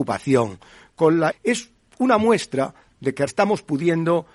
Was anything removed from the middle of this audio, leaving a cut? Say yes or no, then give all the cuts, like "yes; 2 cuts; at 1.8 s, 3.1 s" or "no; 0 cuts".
yes; 2 cuts; at 1.3 s, 3.3 s